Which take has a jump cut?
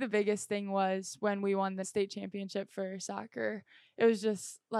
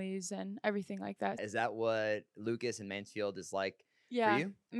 second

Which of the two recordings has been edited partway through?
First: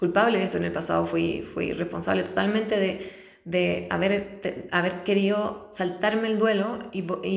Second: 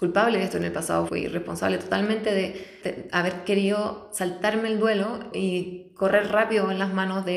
second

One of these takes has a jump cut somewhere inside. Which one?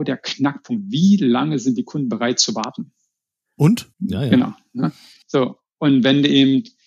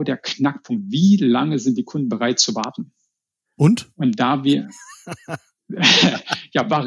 first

